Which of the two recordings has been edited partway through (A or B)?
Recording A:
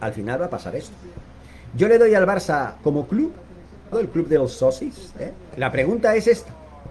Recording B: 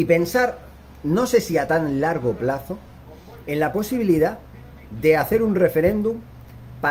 A